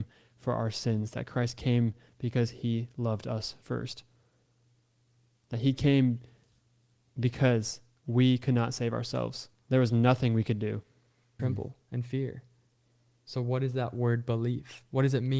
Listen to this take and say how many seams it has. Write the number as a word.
two